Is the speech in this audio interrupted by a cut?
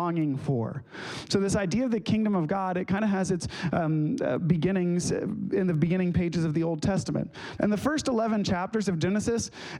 yes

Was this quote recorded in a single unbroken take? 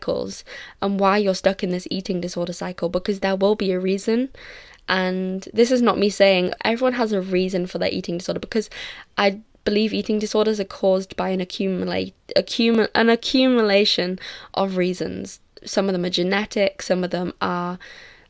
no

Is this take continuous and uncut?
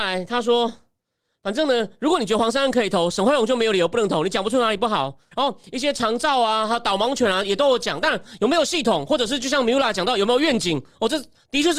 no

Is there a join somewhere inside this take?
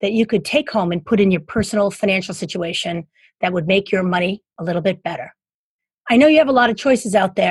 no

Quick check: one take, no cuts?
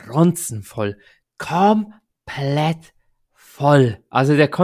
no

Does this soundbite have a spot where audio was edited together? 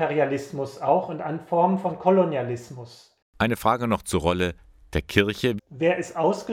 yes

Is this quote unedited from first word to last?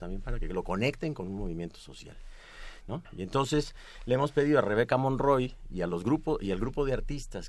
no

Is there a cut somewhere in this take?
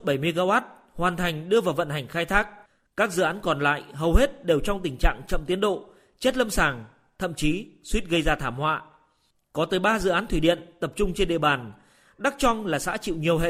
no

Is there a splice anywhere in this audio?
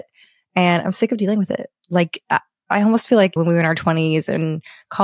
yes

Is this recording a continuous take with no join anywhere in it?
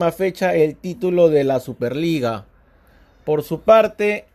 yes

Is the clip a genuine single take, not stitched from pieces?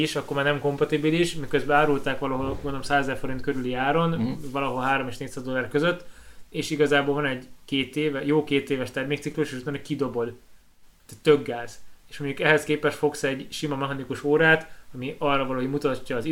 yes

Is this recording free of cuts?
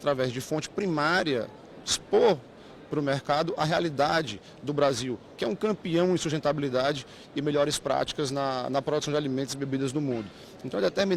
yes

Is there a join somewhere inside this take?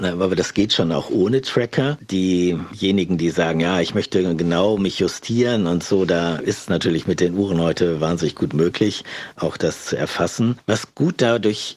no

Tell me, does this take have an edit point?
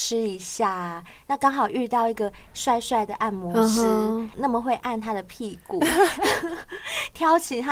no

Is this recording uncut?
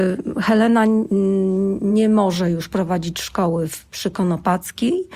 yes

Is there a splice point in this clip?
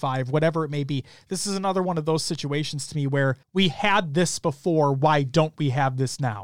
yes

